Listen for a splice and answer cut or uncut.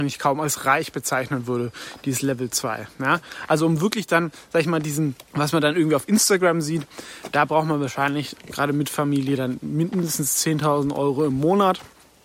cut